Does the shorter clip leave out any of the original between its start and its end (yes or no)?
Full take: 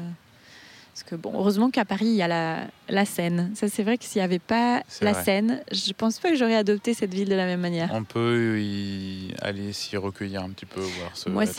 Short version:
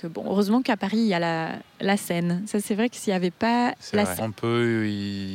yes